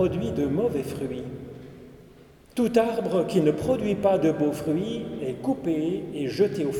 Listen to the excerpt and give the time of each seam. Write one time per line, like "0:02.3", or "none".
0:02.5